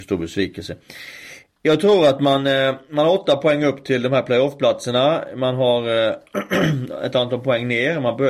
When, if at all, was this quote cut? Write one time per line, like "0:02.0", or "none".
none